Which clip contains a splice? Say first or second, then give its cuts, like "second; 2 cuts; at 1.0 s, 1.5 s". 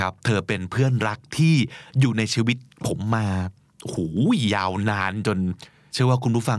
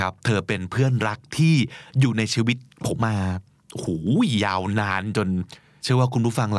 second; 1 cut; at 3.0 s